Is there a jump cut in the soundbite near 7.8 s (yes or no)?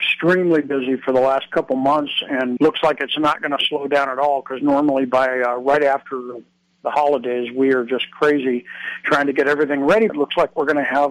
no